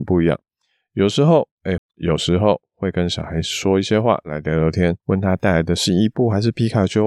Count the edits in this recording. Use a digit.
2